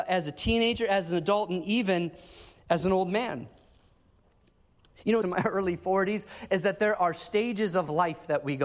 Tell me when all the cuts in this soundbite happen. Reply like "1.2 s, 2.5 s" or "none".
5.2 s